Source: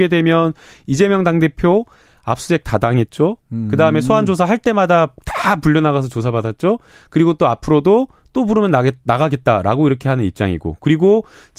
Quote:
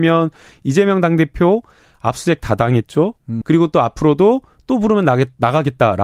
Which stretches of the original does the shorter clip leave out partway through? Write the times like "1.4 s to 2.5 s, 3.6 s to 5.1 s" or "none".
3.6 s to 7.1 s

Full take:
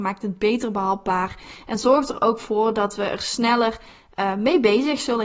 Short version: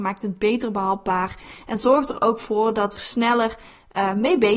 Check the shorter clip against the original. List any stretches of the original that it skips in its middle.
3.0 s to 3.2 s

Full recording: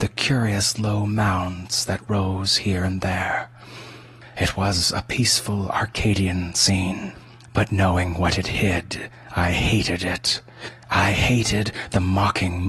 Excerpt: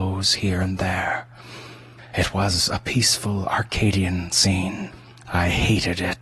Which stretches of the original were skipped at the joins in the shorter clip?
7.5 s to 9.3 s

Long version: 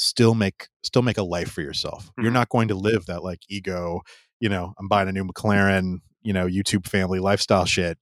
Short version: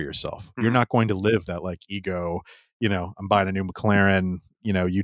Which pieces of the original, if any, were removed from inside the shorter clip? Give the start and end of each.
none

